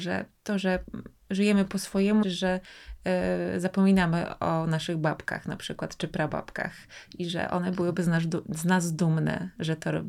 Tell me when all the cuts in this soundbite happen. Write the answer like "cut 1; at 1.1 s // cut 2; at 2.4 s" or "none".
cut 1; at 2.2 s